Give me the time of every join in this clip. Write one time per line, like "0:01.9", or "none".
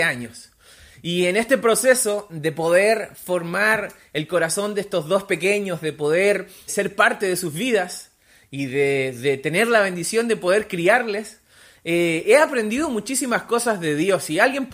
0:06.7